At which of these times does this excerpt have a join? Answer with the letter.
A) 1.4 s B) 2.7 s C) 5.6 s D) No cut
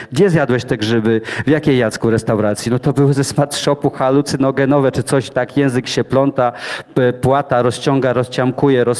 D